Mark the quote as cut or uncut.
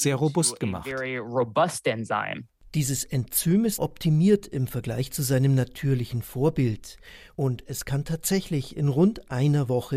cut